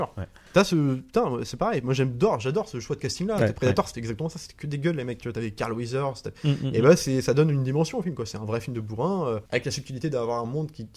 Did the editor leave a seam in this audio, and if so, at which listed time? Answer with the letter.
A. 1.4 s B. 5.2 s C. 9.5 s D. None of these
C